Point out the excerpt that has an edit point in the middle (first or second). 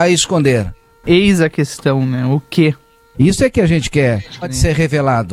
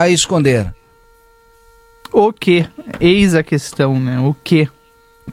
first